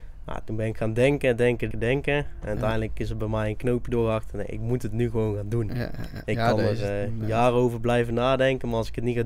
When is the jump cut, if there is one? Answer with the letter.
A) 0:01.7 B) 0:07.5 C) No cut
A